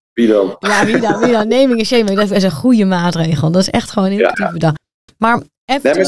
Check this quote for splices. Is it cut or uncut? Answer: cut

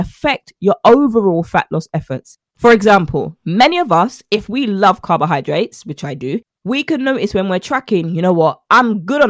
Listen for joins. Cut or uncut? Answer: uncut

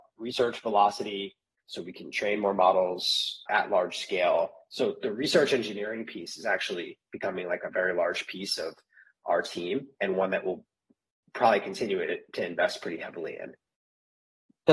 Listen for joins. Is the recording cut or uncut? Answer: cut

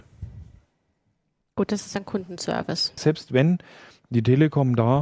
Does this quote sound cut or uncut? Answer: cut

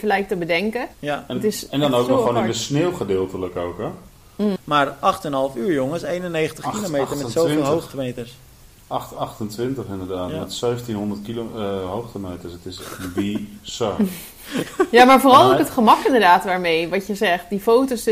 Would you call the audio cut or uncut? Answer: cut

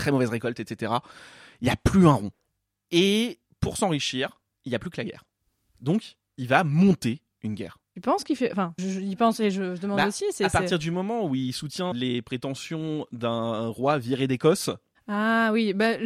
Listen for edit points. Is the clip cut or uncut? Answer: cut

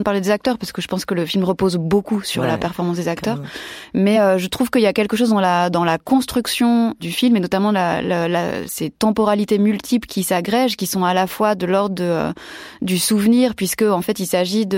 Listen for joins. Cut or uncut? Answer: uncut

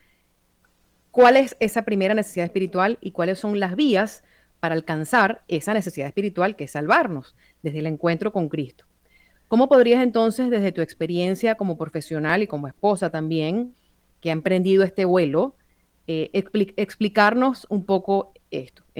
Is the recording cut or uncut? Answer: uncut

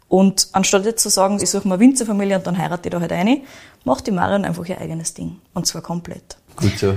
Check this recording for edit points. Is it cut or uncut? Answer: cut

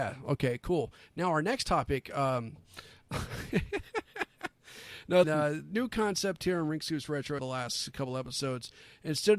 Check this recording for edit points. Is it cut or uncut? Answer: cut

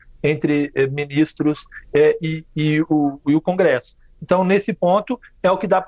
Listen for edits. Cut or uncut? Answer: uncut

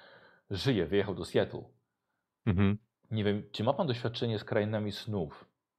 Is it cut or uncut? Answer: cut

